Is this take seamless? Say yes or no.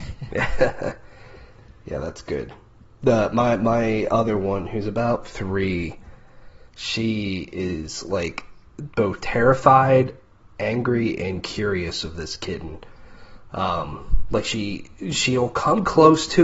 yes